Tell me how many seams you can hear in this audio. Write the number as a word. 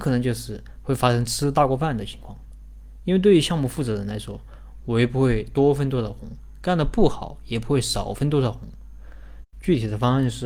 two